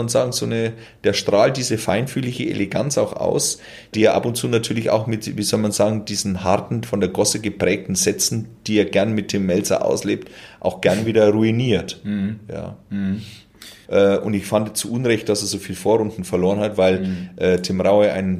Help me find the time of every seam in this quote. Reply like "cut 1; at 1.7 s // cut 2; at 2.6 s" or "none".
cut 1; at 3.9 s // cut 2; at 13.8 s